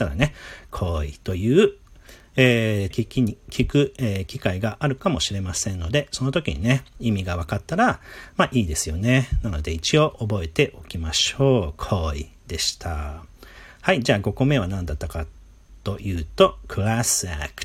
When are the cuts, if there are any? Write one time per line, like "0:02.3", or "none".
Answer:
0:02.9